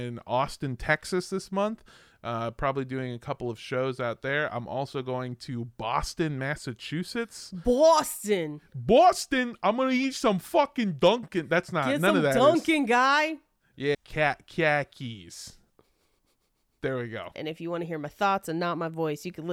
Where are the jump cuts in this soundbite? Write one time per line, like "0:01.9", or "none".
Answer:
0:13.9
0:17.3